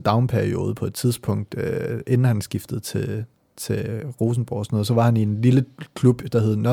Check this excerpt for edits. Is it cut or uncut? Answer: uncut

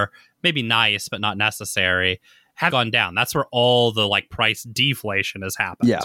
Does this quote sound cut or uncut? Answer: cut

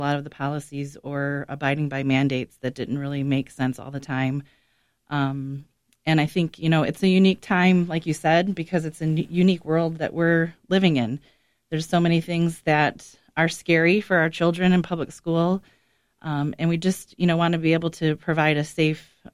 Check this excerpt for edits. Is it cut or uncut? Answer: uncut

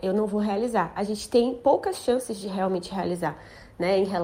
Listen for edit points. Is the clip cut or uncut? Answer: uncut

